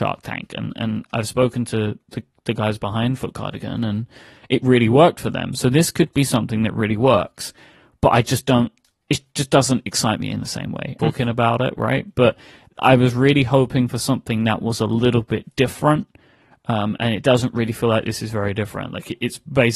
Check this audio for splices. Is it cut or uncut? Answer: cut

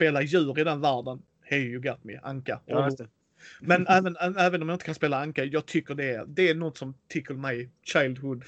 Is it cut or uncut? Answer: uncut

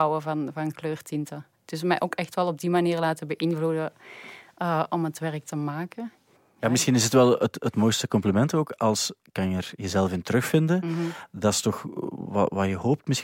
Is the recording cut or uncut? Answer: cut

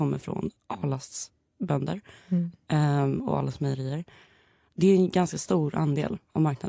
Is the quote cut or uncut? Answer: uncut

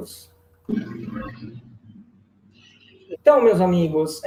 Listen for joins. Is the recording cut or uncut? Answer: cut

